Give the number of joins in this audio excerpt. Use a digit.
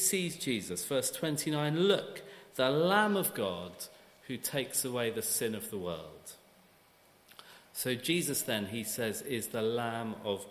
0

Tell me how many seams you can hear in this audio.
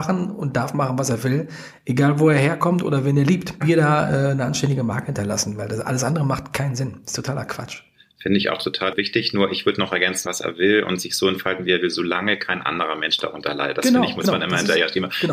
2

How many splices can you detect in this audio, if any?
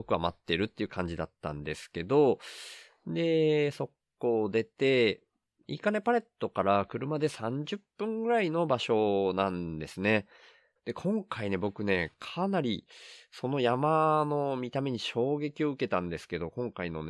1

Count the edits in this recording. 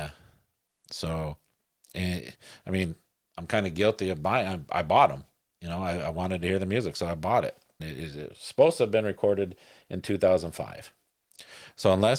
1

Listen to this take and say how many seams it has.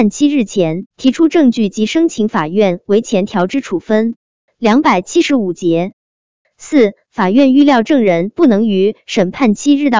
1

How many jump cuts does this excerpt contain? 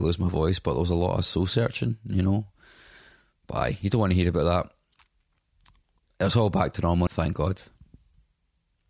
1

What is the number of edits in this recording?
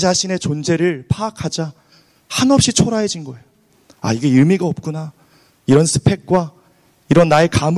0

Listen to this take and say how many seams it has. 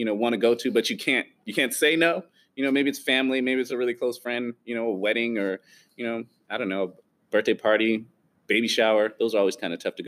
0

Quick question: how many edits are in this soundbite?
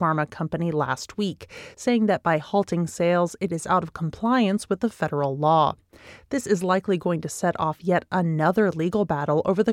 0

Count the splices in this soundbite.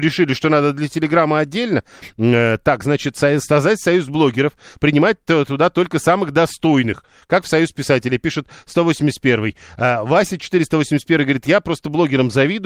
0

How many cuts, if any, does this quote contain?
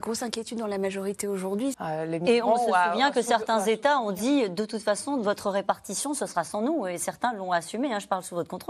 1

